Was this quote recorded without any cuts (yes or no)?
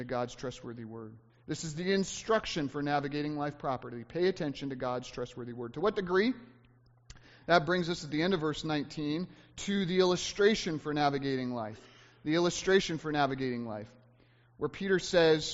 yes